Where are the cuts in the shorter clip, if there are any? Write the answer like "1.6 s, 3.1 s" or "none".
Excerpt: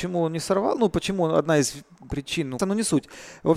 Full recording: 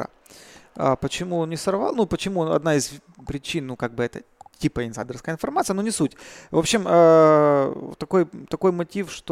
2.6 s